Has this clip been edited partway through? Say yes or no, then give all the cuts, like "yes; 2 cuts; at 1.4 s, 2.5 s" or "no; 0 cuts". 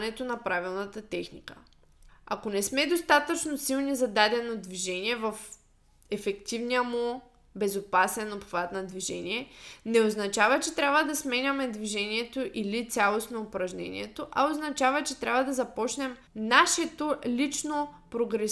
yes; 2 cuts; at 2.1 s, 16.3 s